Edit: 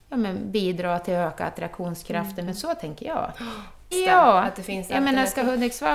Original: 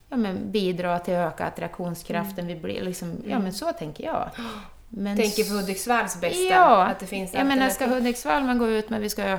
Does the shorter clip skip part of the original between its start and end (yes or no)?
yes